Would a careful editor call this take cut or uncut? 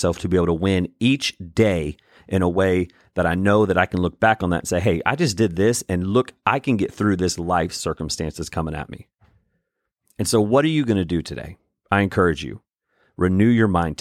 uncut